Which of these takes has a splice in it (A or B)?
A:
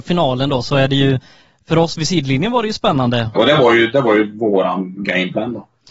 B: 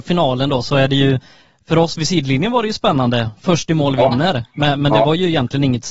A